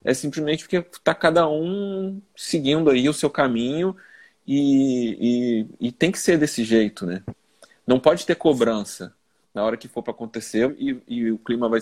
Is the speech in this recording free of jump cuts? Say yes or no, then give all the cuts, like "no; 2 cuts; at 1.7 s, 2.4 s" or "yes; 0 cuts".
no; 2 cuts; at 9.4 s, 10.7 s